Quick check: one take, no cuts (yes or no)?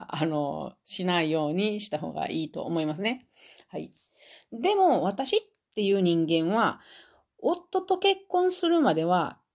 yes